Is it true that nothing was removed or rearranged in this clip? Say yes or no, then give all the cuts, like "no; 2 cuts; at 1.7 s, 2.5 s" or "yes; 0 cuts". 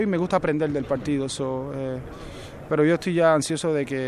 yes; 0 cuts